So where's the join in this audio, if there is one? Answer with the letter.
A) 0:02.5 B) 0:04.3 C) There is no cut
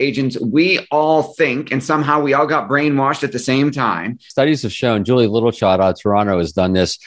B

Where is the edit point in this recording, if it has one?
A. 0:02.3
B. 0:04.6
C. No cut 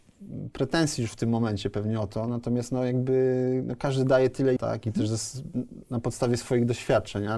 B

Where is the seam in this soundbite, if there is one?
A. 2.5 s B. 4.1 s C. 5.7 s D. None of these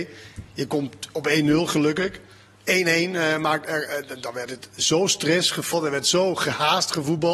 C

